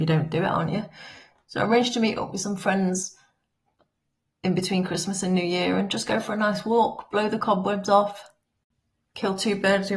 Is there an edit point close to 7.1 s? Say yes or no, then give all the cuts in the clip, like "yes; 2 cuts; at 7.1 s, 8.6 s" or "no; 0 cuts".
no; 0 cuts